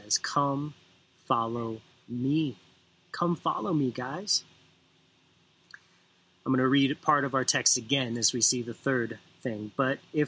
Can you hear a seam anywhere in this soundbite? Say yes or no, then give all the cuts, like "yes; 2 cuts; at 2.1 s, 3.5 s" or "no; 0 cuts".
no; 0 cuts